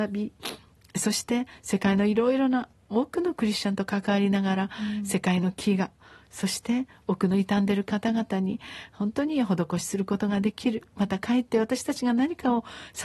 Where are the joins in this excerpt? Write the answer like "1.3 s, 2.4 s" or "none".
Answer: none